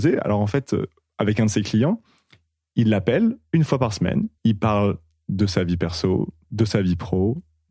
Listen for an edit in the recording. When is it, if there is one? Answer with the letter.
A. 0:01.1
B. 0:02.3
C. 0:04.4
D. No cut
C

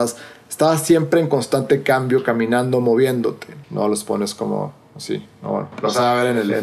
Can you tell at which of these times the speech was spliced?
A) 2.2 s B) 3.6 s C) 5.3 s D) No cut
B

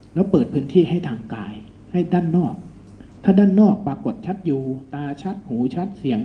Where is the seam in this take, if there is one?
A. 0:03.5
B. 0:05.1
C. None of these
C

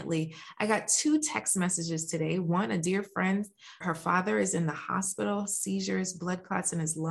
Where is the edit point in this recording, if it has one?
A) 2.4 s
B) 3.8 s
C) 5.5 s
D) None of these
B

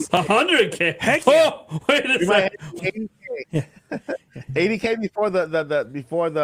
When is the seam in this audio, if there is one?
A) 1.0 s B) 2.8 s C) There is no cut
B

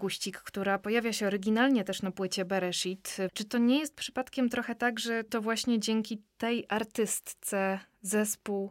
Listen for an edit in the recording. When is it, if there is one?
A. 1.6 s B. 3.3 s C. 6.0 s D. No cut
B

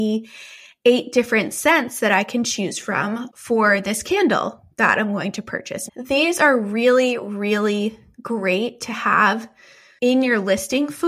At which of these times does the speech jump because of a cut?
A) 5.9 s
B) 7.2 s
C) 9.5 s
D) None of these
A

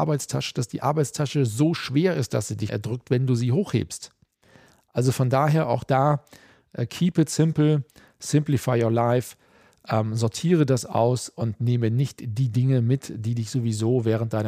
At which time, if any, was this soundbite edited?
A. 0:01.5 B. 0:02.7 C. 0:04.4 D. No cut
B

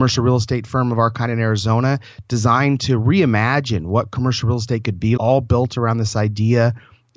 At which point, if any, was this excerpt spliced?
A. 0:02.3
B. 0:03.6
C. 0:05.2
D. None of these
C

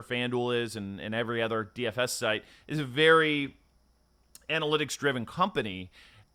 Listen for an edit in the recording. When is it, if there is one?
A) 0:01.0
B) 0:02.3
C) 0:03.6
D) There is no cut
D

